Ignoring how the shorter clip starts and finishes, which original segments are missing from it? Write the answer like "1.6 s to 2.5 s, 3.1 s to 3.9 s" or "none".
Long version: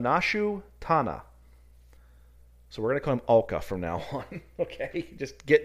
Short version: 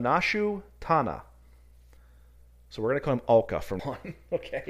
3.8 s to 4.1 s